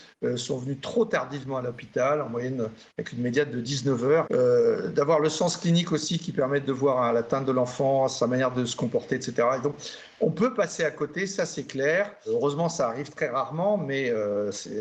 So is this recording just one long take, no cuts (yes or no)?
no